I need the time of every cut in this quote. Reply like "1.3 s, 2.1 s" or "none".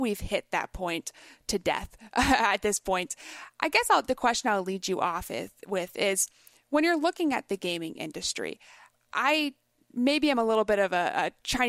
none